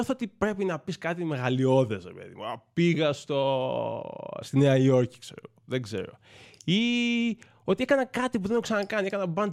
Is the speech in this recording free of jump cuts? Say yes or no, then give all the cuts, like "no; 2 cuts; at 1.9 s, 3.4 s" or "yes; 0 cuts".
yes; 0 cuts